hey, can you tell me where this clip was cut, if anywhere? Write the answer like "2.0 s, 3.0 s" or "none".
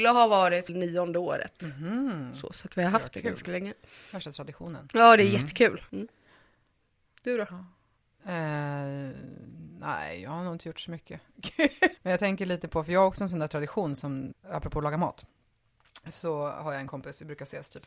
5.9 s, 12.0 s, 14.3 s